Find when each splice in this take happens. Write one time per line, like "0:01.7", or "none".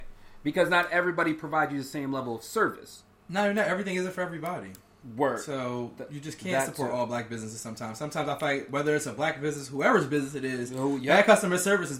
none